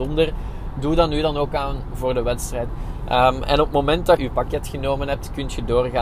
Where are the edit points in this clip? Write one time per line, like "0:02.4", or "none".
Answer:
0:02.7
0:04.2